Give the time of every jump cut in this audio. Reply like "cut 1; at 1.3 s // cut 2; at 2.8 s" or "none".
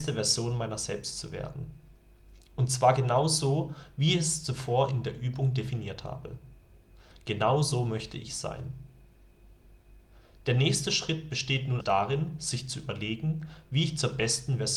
cut 1; at 11.8 s